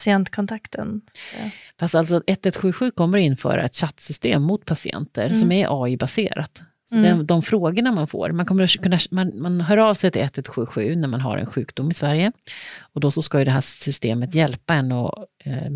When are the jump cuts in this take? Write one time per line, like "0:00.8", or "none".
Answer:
none